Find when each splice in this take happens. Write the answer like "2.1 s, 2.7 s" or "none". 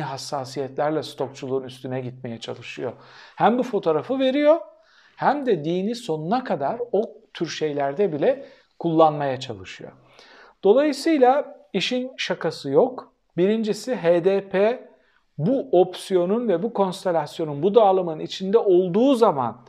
none